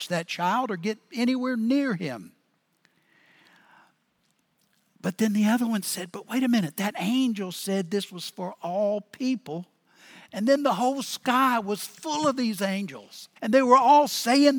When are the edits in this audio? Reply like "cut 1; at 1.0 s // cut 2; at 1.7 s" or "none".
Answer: cut 1; at 13.4 s